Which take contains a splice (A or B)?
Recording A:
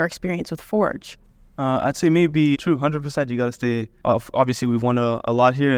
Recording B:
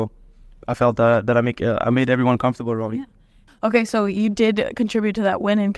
A